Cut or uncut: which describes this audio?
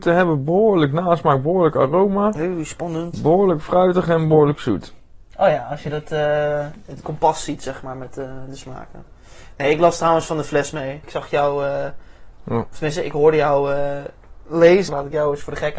cut